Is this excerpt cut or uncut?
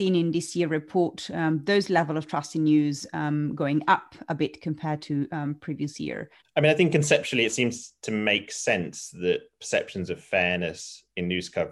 cut